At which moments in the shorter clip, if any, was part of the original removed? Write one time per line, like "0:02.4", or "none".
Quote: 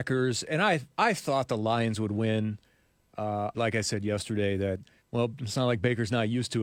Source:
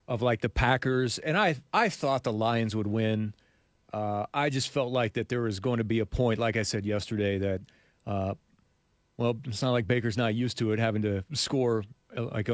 0:03.5
0:05.0